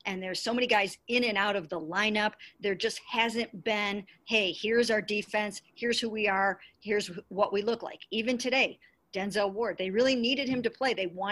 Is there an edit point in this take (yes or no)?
no